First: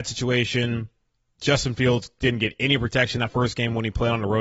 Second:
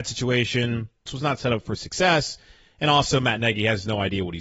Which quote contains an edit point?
second; 1 cut; at 1.1 s

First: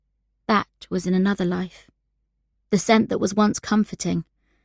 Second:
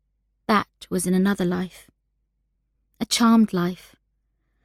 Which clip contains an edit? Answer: first; 1 cut; at 2.5 s

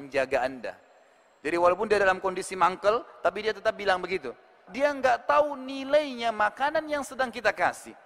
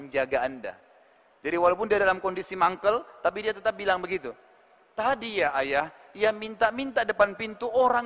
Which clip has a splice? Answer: first; 1 cut; at 4.7 s

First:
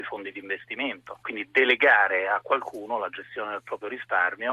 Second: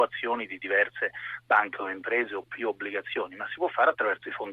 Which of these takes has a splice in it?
first; 1 cut; at 1.2 s

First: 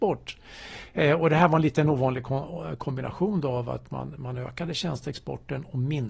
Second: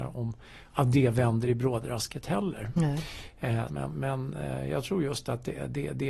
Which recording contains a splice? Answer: second; 1 cut; at 3.7 s

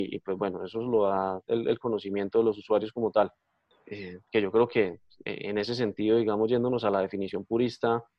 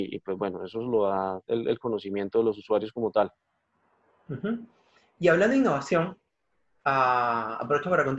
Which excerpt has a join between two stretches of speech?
first; 1 cut; at 3.7 s

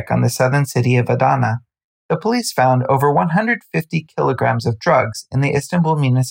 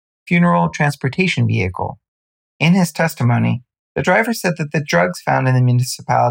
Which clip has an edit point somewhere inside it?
second; 1 cut; at 2.4 s

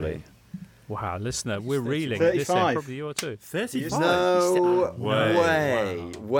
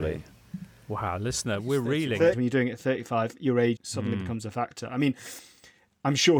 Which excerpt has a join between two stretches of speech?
second; 2 cuts; at 2.3 s, 3.8 s

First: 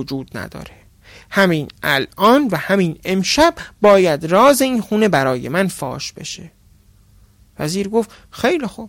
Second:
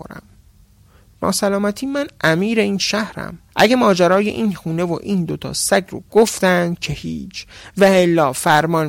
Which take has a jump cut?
second; 1 cut; at 3.5 s

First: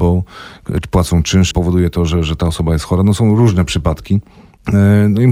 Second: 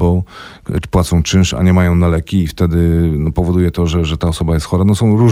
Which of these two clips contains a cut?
first; 1 cut; at 1.5 s

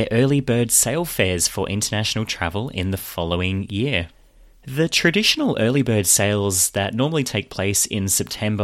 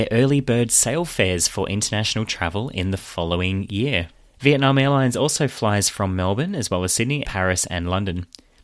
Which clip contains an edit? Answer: second; 2 cuts; at 4.3 s, 7.2 s

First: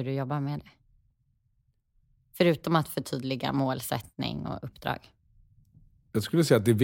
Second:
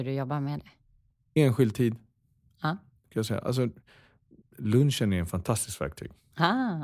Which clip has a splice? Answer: second; 1 cut; at 1.3 s

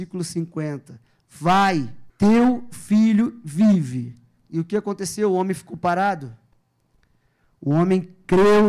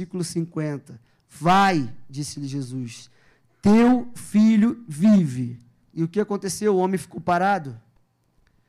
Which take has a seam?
first; 1 cut; at 2.1 s

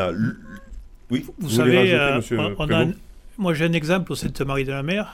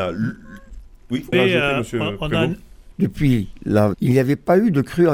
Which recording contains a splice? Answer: second; 3 cuts; at 1.3 s, 2.9 s, 3.9 s

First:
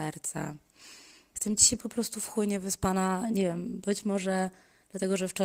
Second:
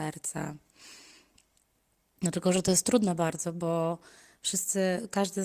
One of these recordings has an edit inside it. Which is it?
first; 1 cut; at 1.3 s

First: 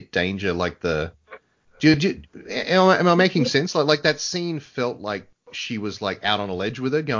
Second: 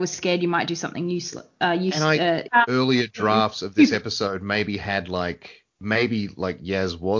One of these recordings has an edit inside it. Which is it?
second; 2 cuts; at 2.5 s, 5.7 s

